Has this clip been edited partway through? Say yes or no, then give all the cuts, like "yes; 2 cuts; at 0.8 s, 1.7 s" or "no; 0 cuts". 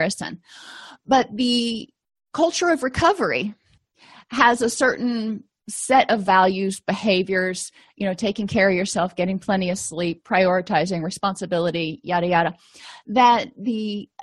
no; 0 cuts